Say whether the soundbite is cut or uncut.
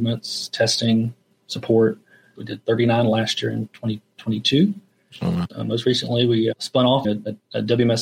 cut